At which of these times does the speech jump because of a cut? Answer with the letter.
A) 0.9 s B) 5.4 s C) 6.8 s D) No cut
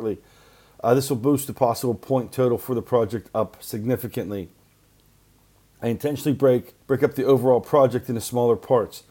C